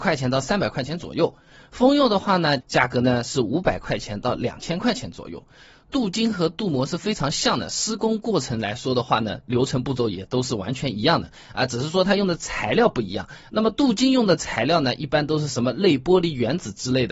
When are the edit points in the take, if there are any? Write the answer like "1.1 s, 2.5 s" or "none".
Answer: 2.6 s, 5.9 s